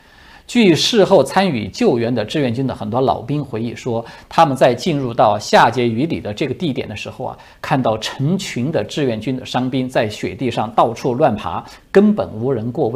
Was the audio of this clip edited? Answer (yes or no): yes